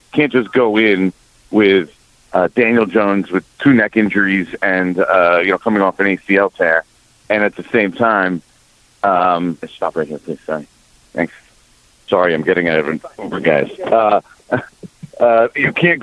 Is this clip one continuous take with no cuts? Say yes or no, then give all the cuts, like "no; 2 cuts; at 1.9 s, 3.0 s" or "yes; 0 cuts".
no; 1 cut; at 9.6 s